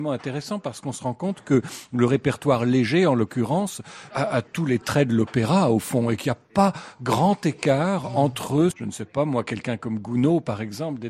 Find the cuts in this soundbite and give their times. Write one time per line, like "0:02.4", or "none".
0:04.1
0:08.7